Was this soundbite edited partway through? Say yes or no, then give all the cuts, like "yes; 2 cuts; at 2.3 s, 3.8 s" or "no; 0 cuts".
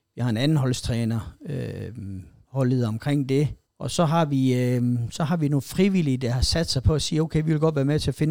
yes; 1 cut; at 3.7 s